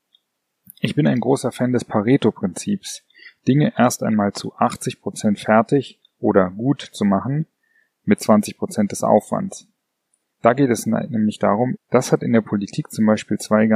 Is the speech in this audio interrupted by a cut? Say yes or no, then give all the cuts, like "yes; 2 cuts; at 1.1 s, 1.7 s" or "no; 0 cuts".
yes; 2 cuts; at 10.3 s, 11.8 s